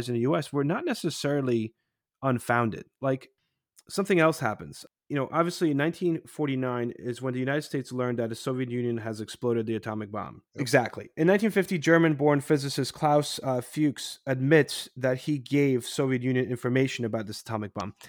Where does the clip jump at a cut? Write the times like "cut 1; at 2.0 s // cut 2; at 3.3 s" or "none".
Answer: cut 1; at 10.5 s